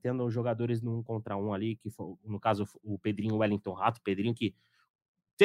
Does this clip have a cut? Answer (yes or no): no